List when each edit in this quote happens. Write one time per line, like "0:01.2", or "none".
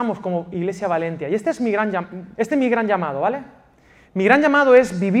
0:02.3